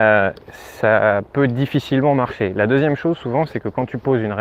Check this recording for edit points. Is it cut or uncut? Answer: uncut